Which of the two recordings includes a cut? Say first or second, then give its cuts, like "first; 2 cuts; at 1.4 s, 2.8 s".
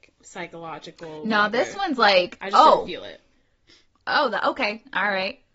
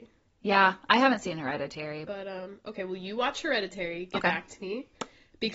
second; 1 cut; at 2.1 s